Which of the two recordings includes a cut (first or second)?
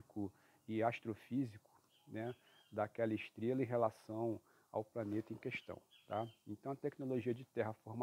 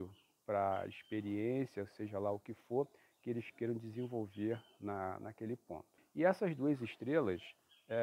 second